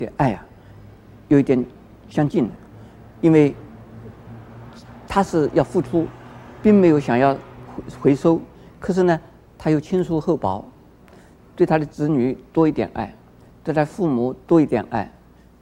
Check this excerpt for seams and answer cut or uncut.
uncut